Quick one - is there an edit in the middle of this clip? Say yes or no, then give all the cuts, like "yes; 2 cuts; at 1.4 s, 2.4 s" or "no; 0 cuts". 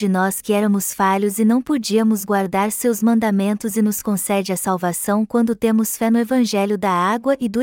no; 0 cuts